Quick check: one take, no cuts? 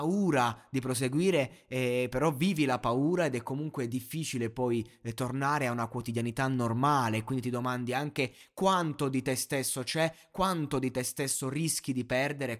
yes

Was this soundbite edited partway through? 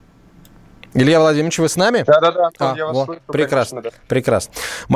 no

